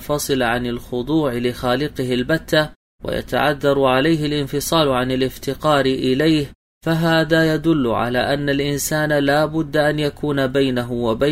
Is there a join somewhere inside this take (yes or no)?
no